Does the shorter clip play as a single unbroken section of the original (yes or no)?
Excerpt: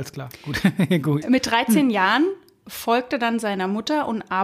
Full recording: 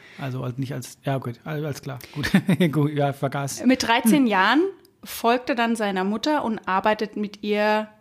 no